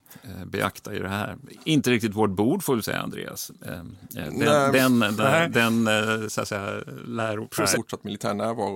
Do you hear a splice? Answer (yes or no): yes